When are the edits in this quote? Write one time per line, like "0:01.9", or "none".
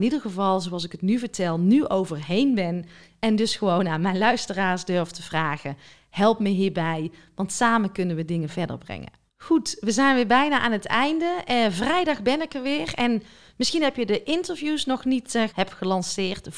0:15.5